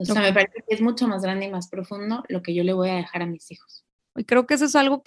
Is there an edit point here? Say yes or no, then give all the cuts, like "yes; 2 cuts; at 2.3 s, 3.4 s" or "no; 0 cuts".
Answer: yes; 1 cut; at 4.2 s